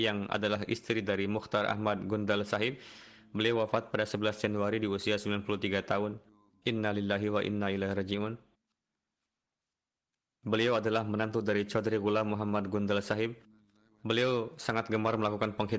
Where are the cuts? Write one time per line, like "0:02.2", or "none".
none